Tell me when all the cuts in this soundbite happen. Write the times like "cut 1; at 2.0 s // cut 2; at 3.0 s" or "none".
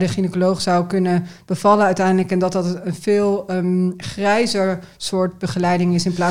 none